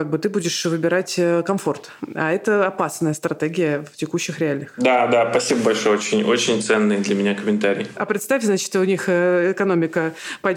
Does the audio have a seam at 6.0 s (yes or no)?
no